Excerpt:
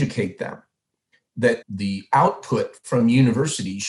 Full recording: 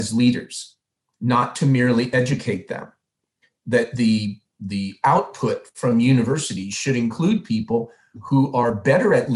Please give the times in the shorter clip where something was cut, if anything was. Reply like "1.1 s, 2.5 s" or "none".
1.6 s